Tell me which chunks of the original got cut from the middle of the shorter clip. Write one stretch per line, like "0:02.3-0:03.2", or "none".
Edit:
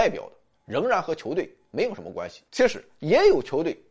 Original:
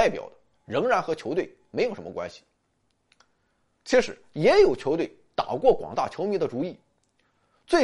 0:02.5-0:03.8